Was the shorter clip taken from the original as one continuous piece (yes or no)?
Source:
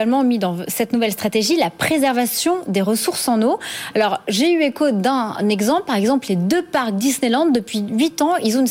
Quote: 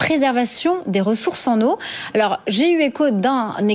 yes